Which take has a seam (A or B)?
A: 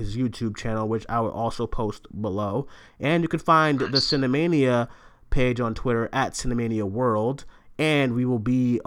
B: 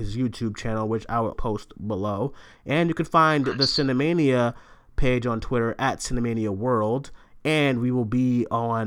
B